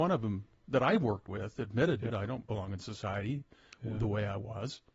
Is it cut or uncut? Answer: cut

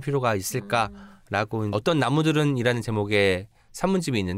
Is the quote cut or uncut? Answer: cut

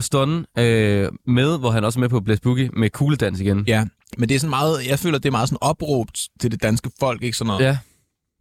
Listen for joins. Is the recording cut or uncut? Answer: uncut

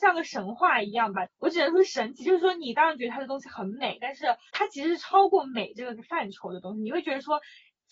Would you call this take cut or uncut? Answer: cut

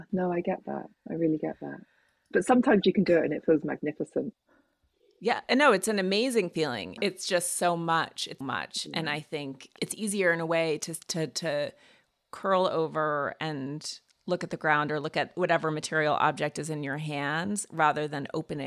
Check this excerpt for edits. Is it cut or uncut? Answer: cut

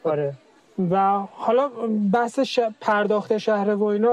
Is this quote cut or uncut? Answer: uncut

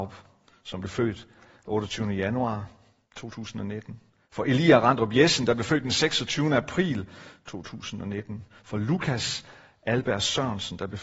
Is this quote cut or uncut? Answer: uncut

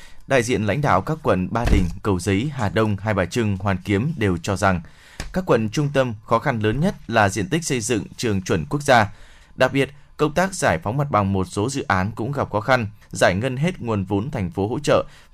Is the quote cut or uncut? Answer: cut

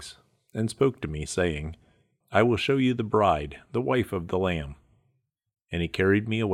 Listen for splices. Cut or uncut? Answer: cut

